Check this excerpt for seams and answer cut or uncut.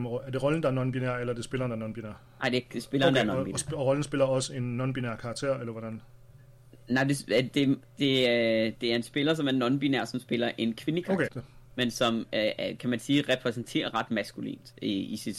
cut